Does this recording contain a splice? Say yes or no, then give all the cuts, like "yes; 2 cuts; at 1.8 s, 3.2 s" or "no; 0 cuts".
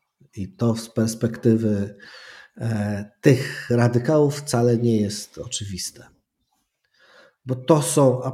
no; 0 cuts